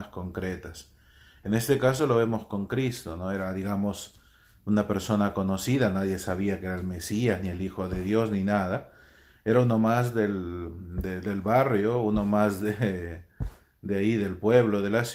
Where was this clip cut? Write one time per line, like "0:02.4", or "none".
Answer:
none